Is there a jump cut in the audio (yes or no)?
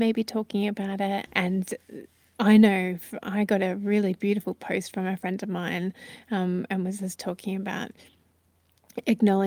yes